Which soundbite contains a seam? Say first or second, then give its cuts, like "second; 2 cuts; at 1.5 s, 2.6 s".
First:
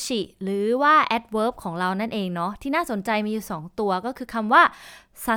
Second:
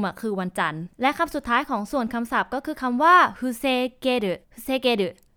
second; 1 cut; at 4.4 s